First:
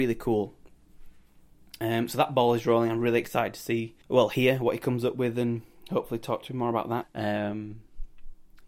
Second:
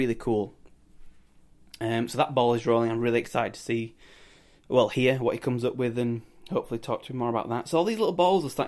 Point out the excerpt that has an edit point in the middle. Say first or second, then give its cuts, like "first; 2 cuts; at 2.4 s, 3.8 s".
first; 2 cuts; at 4.0 s, 7.0 s